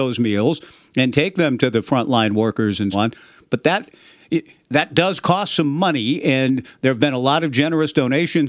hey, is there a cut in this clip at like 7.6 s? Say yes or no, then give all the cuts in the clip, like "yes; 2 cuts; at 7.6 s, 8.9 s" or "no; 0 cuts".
no; 1 cut; at 2.9 s